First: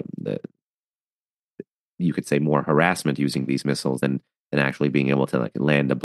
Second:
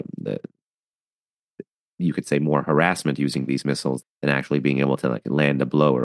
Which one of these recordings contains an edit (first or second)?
second